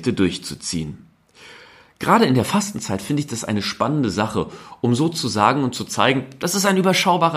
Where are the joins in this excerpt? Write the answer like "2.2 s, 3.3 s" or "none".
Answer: none